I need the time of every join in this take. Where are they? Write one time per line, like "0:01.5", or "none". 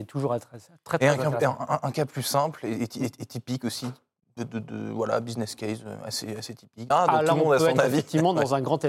0:06.9